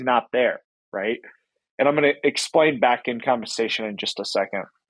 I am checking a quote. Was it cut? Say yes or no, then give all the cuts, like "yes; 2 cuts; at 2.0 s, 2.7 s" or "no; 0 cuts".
no; 0 cuts